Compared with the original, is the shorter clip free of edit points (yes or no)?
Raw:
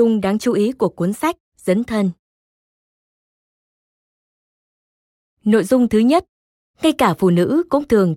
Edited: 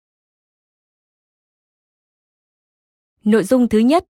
yes